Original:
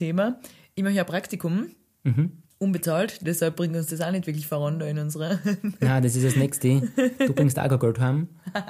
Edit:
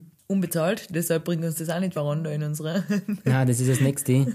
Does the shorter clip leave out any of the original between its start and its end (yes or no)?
yes